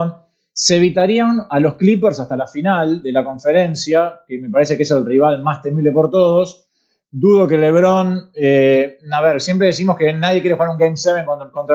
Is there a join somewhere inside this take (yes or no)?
yes